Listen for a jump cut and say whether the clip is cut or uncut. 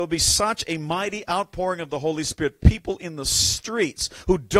uncut